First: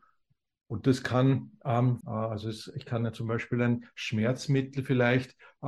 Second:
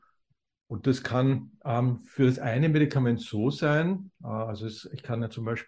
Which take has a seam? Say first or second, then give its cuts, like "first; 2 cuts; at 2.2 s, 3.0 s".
first; 1 cut; at 2.0 s